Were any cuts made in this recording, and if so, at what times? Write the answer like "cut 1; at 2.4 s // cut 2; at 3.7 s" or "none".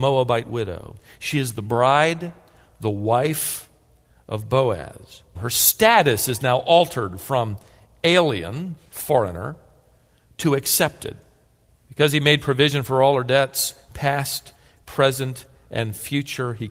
cut 1; at 5.3 s